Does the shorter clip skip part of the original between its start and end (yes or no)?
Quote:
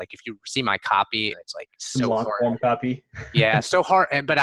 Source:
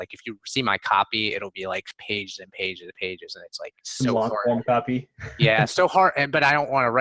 yes